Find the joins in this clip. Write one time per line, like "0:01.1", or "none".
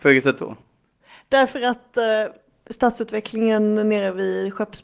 none